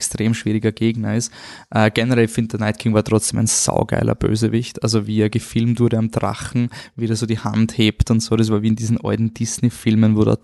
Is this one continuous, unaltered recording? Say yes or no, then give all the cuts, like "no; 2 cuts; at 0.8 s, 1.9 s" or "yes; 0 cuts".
yes; 0 cuts